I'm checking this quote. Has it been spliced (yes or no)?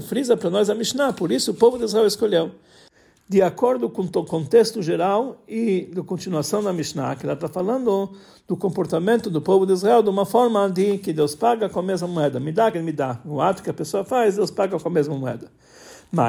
yes